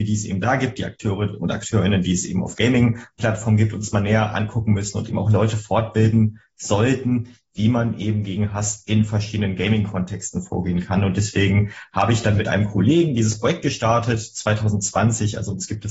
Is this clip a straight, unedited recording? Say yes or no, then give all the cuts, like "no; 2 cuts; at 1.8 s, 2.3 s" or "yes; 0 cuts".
no; 1 cut; at 5.1 s